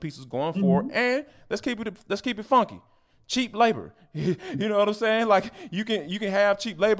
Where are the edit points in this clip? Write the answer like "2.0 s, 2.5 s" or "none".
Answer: none